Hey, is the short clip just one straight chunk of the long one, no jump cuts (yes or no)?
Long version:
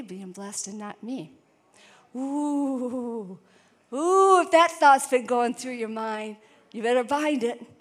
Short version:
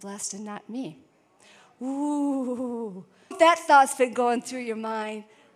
no